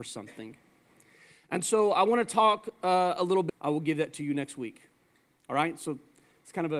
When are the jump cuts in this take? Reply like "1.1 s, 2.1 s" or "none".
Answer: 3.5 s

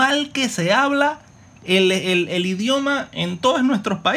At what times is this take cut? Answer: none

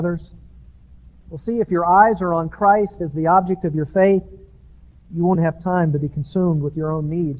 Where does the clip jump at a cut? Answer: 5.3 s

